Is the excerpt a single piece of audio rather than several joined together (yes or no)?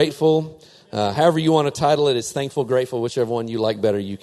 yes